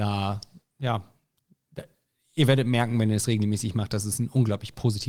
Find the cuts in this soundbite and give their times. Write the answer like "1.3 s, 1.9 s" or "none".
none